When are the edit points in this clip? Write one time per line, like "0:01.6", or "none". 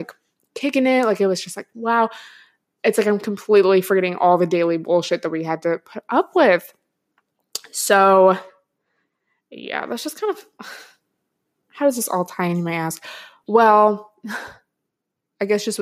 none